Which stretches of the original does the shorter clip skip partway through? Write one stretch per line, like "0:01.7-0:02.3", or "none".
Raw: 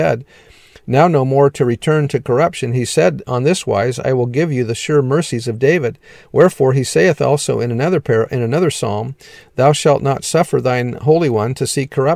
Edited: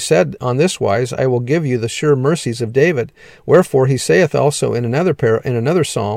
none

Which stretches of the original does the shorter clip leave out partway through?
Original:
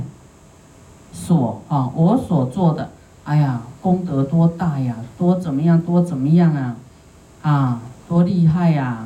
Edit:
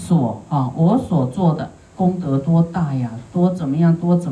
0:03.1-0:03.8

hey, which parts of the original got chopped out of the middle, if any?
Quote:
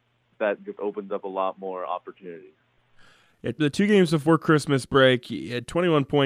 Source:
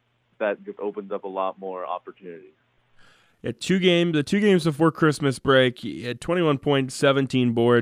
0:03.6-0:04.1

